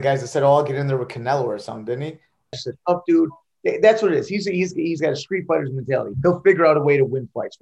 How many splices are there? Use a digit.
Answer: 2